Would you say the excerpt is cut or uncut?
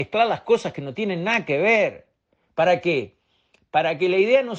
uncut